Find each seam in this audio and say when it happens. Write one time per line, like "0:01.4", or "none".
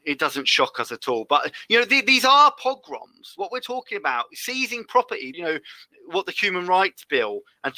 0:05.3